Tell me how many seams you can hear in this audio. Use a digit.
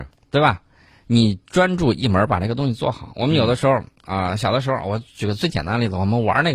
0